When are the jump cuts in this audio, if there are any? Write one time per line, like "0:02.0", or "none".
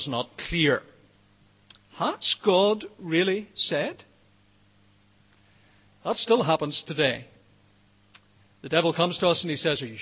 none